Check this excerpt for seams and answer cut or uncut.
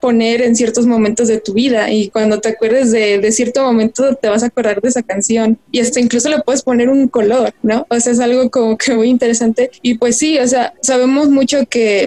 uncut